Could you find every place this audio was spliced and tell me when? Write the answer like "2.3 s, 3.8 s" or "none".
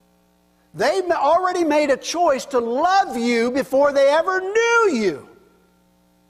none